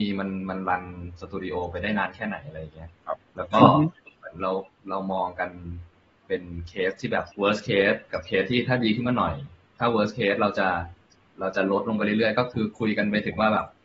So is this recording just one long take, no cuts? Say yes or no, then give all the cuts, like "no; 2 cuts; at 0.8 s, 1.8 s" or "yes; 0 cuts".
no; 1 cut; at 7.3 s